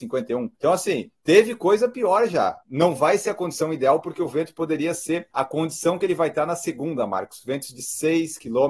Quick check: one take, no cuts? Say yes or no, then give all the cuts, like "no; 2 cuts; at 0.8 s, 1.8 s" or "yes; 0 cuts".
yes; 0 cuts